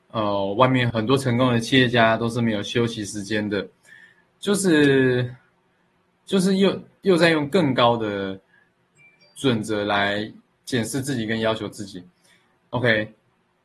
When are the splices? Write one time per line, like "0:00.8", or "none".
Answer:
0:00.9